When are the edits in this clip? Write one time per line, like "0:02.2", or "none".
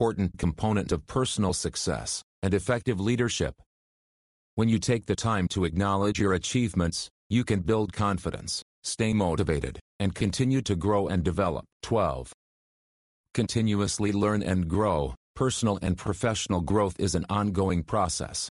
0:11.7
0:15.2